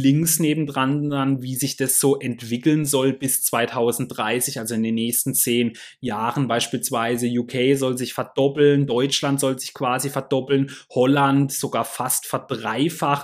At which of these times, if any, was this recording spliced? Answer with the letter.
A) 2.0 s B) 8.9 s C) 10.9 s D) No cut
D